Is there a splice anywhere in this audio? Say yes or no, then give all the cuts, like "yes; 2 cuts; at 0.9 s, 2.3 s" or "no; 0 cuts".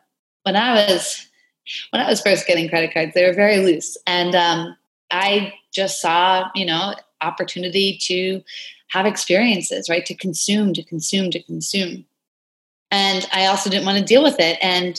no; 0 cuts